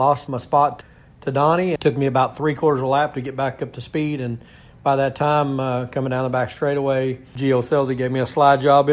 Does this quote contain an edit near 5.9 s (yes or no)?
no